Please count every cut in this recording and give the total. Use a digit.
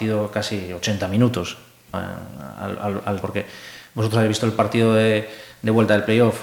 2